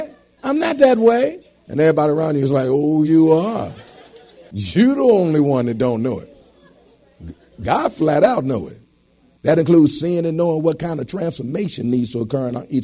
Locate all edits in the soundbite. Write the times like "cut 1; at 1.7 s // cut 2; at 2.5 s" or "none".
cut 1; at 3.0 s